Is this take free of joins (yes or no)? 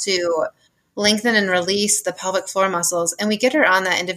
yes